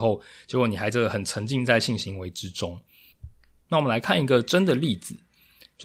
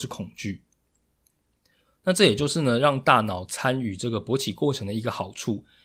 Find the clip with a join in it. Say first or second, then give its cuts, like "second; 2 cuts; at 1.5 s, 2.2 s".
first; 1 cut; at 3.7 s